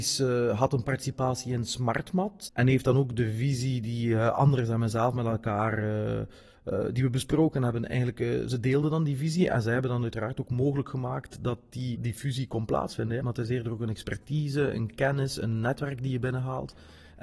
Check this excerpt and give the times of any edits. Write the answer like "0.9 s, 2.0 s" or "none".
11.9 s, 13.2 s